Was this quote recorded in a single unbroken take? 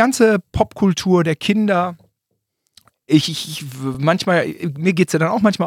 yes; 0 cuts

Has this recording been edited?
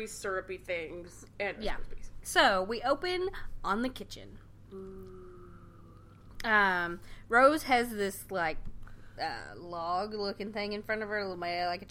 yes; 1 cut; at 2.2 s

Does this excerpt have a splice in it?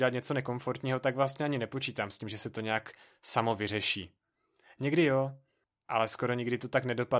no; 0 cuts

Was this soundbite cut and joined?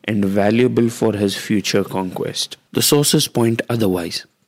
yes; 1 cut; at 2.7 s

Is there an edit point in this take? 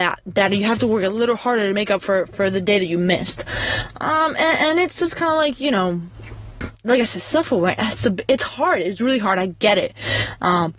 no; 0 cuts

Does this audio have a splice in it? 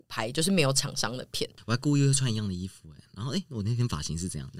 no; 0 cuts

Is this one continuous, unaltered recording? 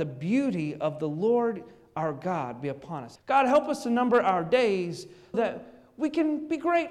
no; 2 cuts; at 3.2 s, 5.3 s

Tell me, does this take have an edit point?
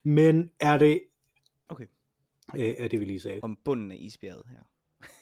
yes; 2 cuts; at 1.7 s, 3.4 s

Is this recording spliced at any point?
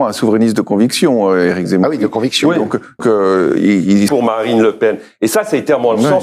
yes; 2 cuts; at 3.0 s, 4.1 s

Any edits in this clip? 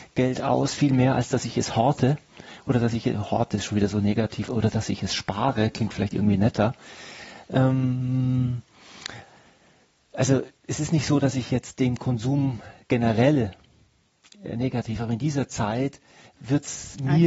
no; 0 cuts

